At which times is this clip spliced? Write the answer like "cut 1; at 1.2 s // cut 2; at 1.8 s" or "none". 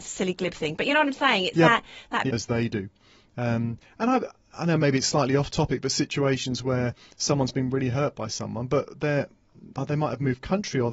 cut 1; at 2.3 s